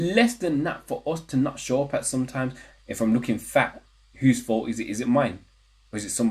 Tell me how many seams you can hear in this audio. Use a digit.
1